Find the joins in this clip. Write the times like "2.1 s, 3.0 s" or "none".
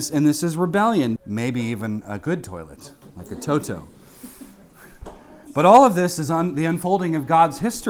1.2 s

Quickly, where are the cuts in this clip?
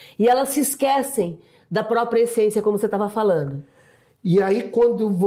none

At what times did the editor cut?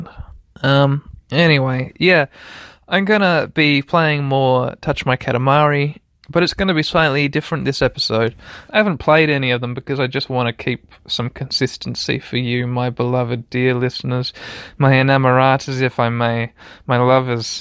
6.1 s, 8.7 s

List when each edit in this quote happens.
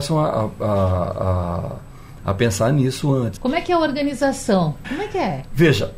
3.4 s, 4.8 s

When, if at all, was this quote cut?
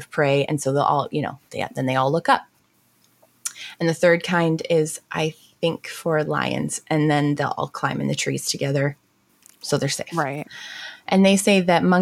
none

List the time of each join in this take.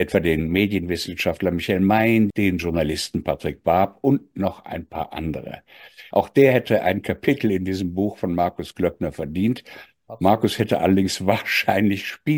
2.3 s, 6.1 s

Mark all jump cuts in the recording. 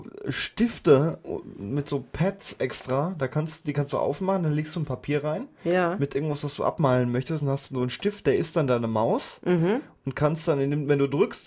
none

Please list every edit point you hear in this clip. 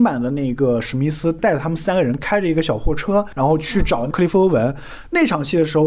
none

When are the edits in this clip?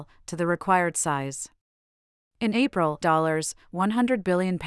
3.0 s

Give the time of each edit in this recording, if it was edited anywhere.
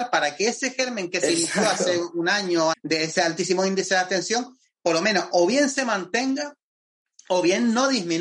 2.7 s

